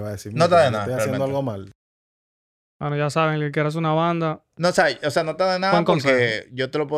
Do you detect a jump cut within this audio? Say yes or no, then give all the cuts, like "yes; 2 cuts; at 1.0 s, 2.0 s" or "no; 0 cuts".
no; 0 cuts